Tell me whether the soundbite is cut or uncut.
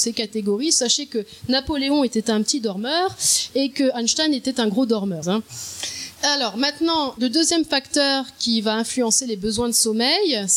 cut